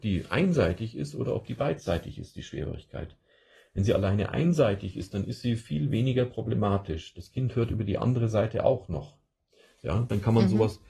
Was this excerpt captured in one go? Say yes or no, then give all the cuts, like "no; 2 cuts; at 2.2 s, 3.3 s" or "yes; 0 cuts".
yes; 0 cuts